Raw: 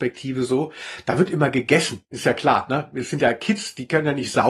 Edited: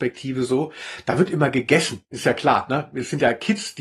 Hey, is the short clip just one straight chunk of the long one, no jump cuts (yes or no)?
yes